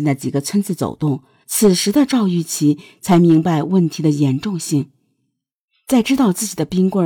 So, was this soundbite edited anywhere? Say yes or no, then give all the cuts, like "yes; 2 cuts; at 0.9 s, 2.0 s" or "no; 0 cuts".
yes; 1 cut; at 1.4 s